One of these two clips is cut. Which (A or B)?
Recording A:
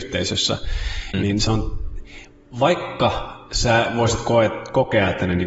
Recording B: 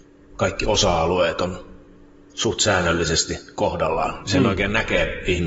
A